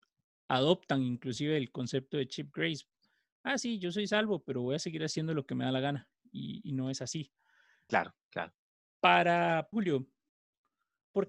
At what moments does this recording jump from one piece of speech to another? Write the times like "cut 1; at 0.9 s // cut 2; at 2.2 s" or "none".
cut 1; at 7.9 s // cut 2; at 9.7 s

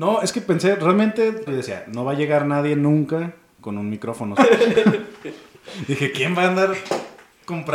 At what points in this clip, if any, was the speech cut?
cut 1; at 1.5 s // cut 2; at 4.4 s

